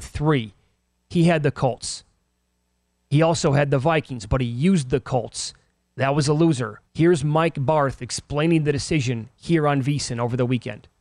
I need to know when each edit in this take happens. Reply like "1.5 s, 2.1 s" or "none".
6.9 s

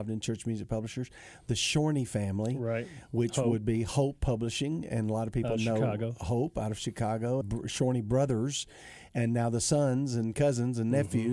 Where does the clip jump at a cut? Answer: 7.4 s

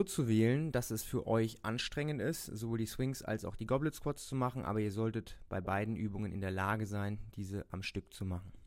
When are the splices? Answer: none

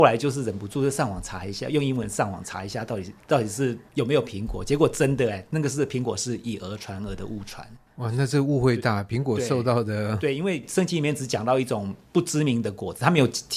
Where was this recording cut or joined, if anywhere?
none

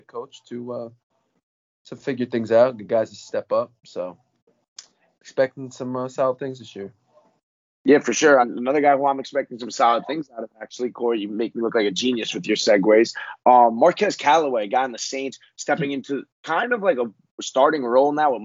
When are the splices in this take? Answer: none

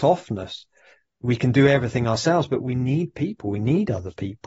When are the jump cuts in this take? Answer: none

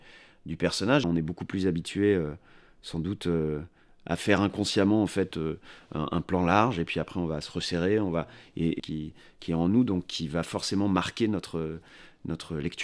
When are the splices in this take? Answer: 1.0 s, 8.8 s

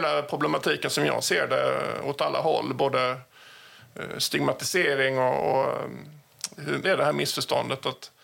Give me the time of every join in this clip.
6.8 s

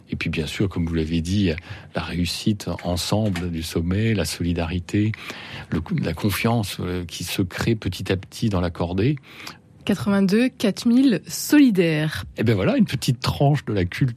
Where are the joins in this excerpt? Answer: 9.8 s, 12.3 s

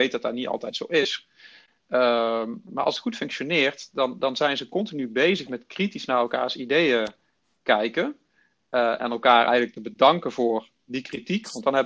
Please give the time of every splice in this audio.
9.0 s

